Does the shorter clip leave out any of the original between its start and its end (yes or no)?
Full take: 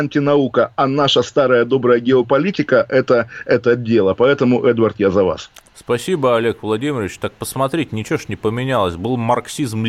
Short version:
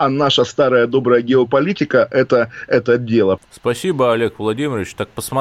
yes